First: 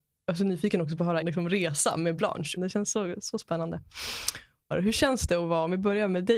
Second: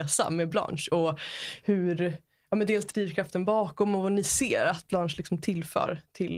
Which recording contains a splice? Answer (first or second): first